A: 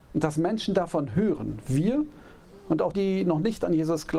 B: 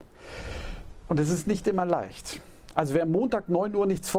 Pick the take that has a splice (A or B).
A